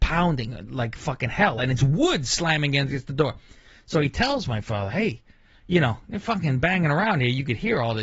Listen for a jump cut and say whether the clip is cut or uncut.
uncut